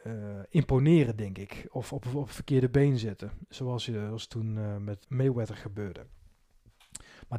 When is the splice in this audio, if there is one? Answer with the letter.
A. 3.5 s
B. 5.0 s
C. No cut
B